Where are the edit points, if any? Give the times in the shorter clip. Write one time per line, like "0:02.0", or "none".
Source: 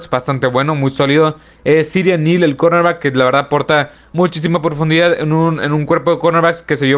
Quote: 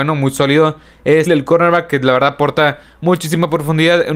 0:01.3